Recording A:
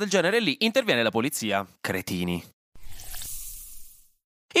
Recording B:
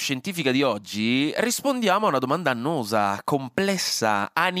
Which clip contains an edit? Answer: A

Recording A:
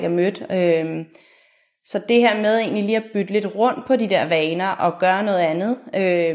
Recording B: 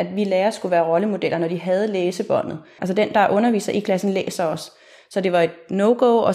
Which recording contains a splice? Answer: B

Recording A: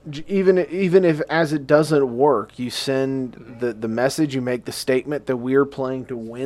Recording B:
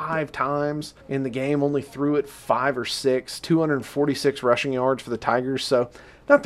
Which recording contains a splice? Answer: B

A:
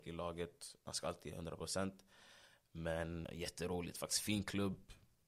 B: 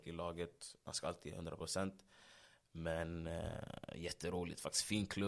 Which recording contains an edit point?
A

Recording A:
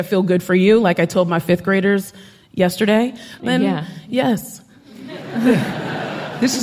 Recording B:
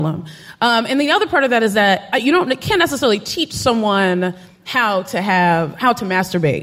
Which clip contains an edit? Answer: A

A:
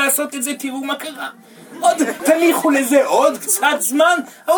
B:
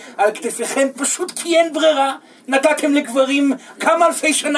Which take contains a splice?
A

